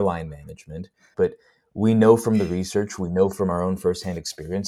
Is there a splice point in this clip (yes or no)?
yes